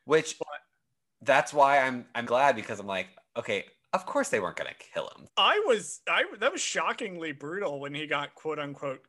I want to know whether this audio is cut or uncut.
cut